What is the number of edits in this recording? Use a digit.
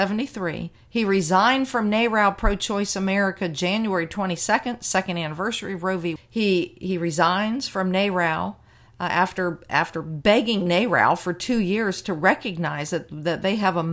1